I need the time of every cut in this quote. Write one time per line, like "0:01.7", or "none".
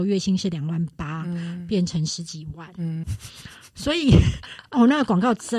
0:03.0